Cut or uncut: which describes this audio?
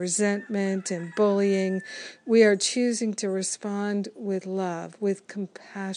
uncut